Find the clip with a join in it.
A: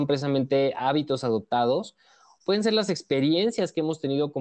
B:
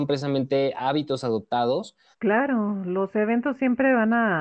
B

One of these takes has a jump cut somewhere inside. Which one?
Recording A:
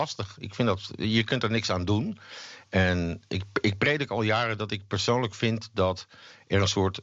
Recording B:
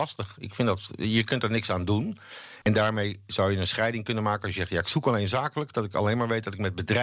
B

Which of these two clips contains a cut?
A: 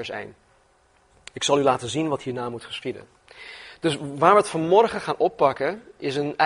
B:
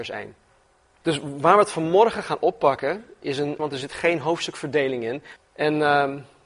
B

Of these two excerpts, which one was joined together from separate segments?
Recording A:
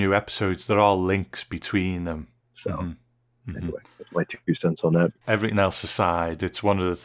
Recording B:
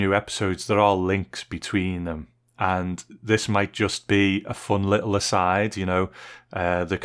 A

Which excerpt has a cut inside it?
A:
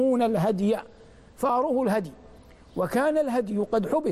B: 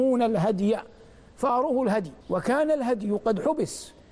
B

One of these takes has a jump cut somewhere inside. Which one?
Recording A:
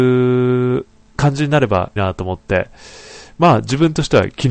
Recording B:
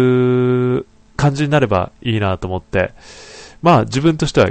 A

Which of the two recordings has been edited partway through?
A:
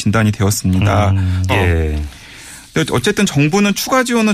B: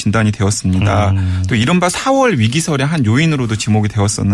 A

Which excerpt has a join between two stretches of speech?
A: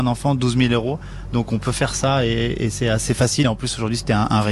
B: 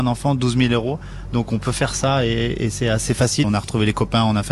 B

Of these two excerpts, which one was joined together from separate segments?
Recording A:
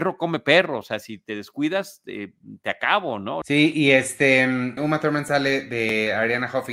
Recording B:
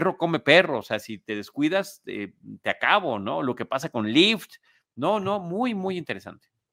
A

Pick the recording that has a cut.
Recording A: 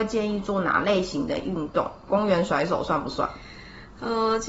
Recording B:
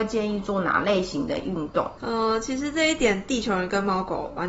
B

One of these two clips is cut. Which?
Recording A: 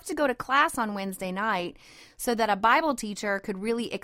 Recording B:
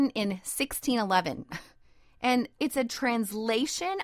B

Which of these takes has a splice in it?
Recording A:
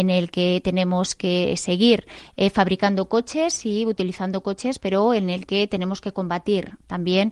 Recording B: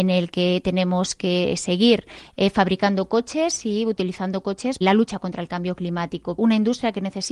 B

